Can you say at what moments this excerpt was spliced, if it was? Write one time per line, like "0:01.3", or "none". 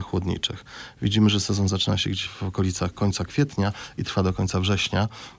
0:02.3